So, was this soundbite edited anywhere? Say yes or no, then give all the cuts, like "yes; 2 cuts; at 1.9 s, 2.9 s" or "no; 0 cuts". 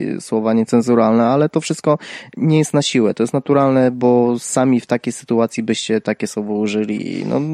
no; 0 cuts